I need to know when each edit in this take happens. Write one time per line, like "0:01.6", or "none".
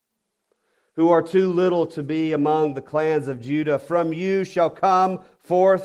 none